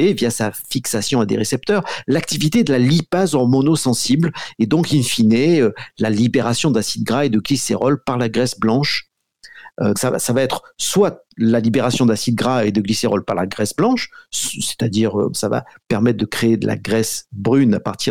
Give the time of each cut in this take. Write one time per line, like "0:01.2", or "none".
0:09.9
0:15.3